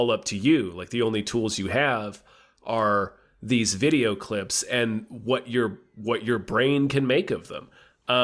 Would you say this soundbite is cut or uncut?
uncut